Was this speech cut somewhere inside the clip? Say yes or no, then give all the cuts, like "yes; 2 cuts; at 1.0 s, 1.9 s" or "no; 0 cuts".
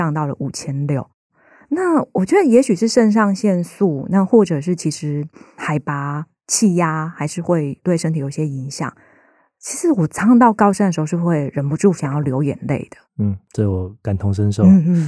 no; 0 cuts